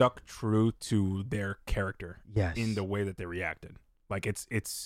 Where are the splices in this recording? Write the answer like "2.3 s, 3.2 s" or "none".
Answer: none